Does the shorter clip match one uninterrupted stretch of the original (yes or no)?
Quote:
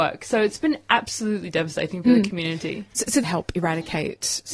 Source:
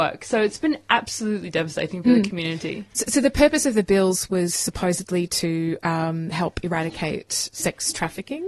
no